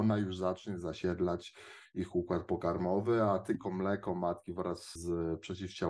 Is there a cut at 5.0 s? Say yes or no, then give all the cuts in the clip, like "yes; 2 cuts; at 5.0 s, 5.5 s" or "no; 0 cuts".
yes; 1 cut; at 5.0 s